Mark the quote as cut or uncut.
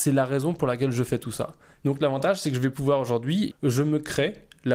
cut